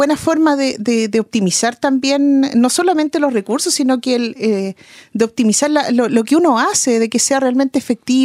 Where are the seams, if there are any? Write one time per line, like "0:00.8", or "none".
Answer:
none